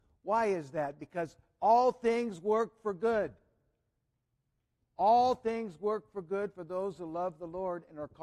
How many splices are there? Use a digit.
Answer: 0